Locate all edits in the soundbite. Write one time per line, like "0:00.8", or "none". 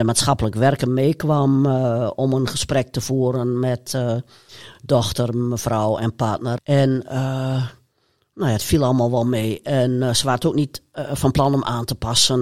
0:06.6